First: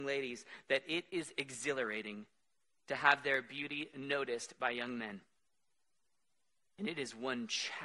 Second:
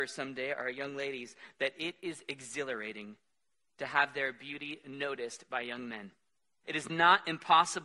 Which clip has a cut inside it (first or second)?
second